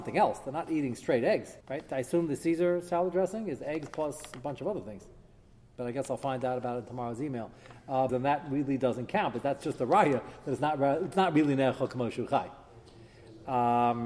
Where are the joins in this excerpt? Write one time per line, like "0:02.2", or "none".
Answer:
0:01.6
0:08.1